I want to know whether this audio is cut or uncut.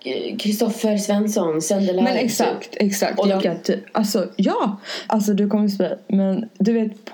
cut